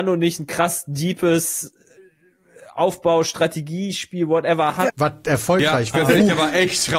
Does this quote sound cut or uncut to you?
cut